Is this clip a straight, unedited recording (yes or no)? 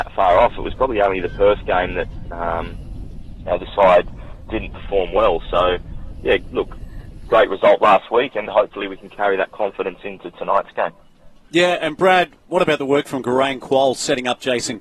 no